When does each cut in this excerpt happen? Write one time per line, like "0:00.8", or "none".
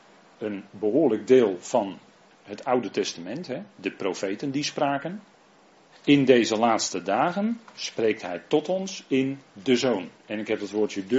0:05.9